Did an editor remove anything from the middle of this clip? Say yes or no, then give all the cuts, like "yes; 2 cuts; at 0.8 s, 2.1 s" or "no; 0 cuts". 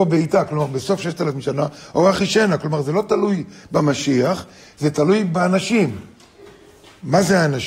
no; 0 cuts